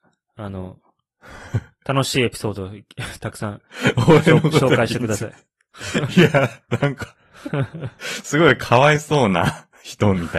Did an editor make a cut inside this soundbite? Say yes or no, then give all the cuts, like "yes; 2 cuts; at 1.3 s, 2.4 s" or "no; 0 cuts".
no; 0 cuts